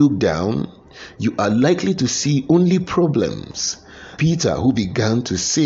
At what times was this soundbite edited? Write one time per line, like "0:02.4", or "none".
0:04.2